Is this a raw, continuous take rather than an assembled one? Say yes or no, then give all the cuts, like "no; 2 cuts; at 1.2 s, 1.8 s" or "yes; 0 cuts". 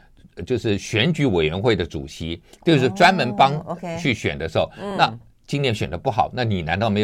yes; 0 cuts